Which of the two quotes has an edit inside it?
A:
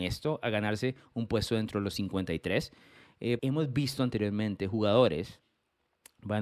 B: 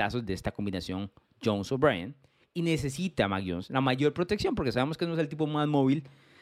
A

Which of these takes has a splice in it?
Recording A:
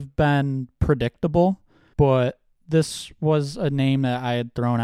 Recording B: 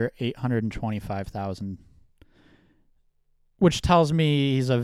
A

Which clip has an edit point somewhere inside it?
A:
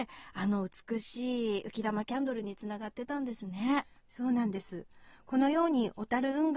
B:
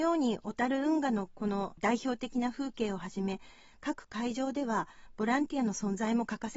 A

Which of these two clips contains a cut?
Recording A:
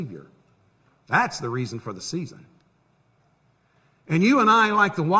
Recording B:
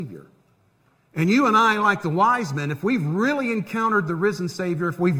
B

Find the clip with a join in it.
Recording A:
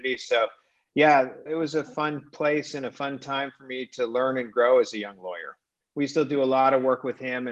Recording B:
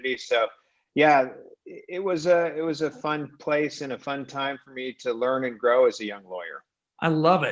A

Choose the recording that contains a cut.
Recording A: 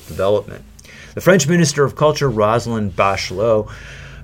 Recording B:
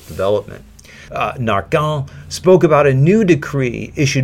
B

